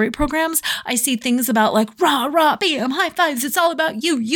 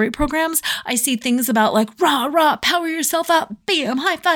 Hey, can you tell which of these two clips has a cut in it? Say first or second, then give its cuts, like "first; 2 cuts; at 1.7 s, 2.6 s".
first; 1 cut; at 2.6 s